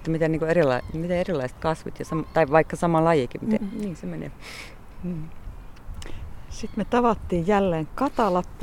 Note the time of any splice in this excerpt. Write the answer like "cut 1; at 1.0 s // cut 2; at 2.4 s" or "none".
cut 1; at 3.6 s